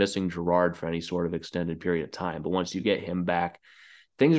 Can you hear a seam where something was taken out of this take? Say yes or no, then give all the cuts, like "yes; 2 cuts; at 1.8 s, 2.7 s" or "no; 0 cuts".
no; 0 cuts